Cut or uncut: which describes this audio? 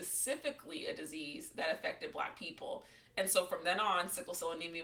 uncut